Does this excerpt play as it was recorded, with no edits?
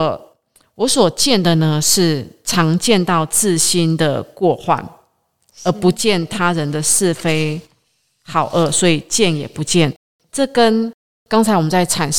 yes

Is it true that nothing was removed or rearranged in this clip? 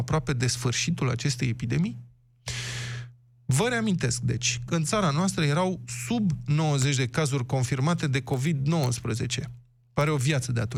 no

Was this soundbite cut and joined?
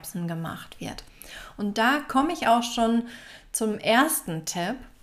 no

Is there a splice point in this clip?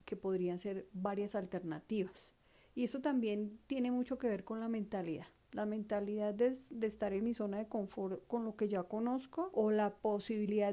no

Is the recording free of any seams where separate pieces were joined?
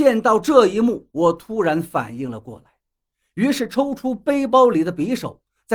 yes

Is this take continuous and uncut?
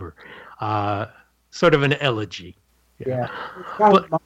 yes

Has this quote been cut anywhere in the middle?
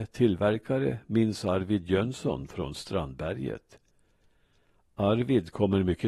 no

